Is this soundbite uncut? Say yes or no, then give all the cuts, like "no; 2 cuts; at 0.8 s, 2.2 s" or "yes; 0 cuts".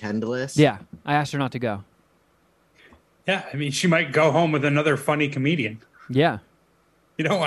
yes; 0 cuts